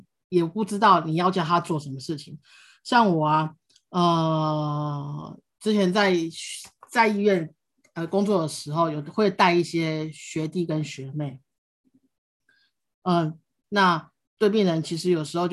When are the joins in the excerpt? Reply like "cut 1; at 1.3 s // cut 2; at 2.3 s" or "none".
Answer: cut 1; at 13.6 s